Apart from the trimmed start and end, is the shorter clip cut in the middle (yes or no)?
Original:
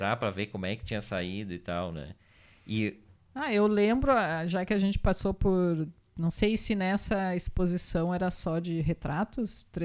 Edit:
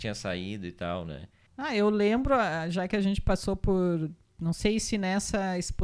yes